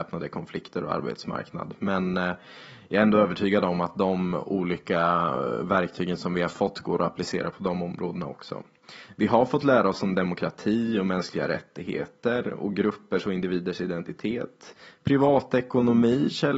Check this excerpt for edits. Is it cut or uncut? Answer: uncut